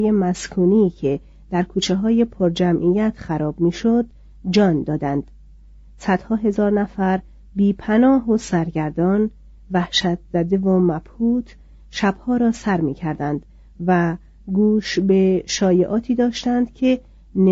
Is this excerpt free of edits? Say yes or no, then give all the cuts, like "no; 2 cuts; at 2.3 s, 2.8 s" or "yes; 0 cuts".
yes; 0 cuts